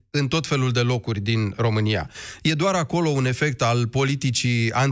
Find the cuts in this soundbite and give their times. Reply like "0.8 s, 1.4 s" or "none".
none